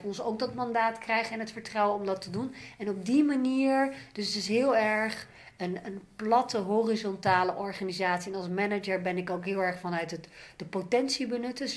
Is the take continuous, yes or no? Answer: yes